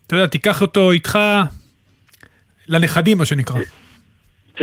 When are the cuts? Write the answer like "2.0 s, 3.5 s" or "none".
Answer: none